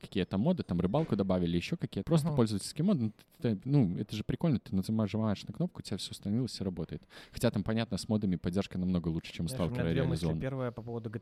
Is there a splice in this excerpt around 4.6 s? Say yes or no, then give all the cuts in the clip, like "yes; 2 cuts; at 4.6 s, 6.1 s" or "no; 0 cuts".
no; 1 cut; at 2.0 s